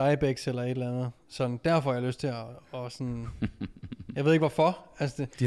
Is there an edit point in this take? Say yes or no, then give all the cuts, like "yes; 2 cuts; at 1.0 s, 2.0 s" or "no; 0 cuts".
no; 0 cuts